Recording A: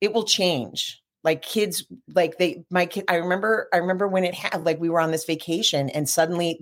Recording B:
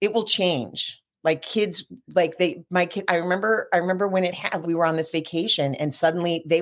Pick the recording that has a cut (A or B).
B